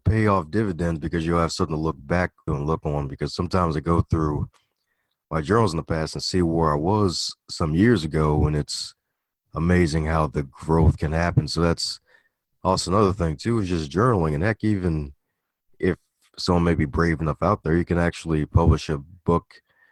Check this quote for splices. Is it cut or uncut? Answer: cut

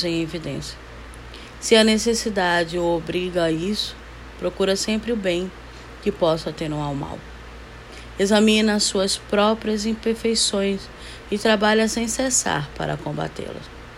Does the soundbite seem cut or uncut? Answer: uncut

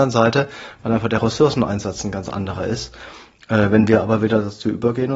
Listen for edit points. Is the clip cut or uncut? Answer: uncut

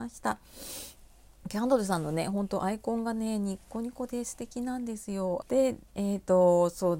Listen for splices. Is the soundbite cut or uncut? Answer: cut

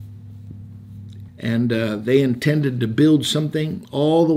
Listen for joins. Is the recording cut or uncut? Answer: cut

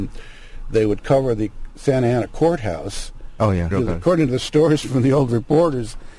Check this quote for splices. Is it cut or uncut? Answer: cut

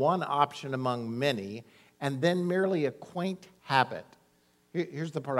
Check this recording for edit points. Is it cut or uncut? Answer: uncut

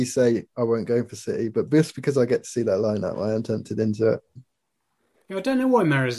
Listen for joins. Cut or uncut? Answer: uncut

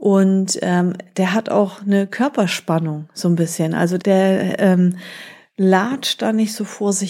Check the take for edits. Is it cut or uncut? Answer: cut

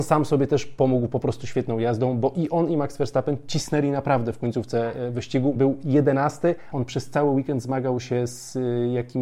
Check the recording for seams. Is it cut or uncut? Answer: cut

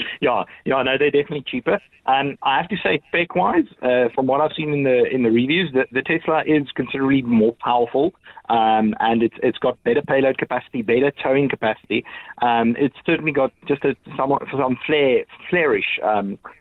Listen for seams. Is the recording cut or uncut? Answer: cut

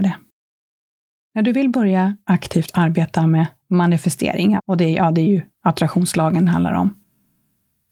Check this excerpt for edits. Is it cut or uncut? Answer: cut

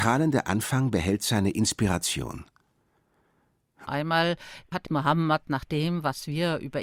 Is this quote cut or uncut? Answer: cut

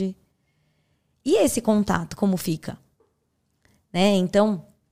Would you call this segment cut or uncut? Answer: uncut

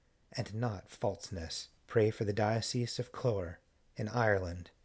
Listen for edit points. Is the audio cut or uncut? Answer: cut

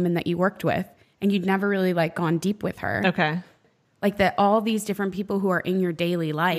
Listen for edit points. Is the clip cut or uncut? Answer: cut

